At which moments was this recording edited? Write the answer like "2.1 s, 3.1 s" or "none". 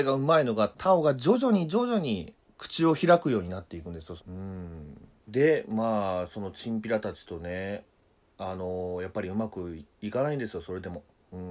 4.2 s